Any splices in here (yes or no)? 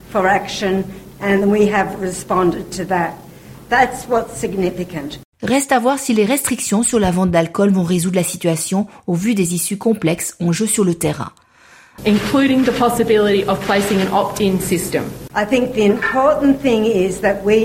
yes